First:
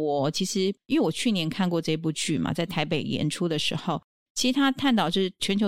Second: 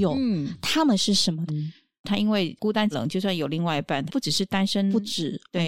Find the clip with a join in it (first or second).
second